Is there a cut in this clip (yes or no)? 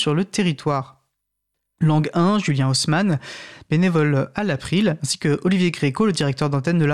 yes